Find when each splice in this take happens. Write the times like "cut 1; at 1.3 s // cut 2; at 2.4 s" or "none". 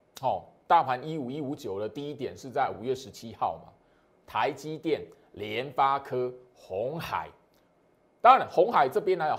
none